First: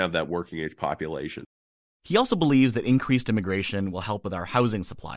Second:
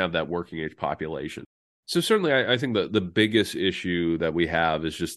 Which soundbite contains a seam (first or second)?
second